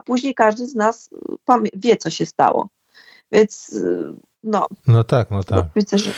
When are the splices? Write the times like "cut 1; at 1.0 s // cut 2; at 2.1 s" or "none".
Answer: none